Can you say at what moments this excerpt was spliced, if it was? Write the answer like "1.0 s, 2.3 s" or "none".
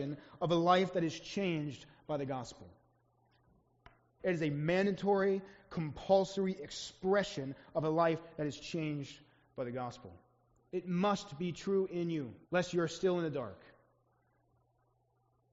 4.2 s, 10.6 s, 12.4 s